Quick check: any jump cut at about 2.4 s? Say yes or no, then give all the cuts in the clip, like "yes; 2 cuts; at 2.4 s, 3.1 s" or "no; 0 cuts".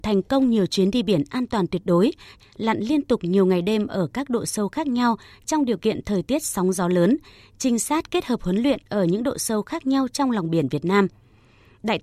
yes; 1 cut; at 2.4 s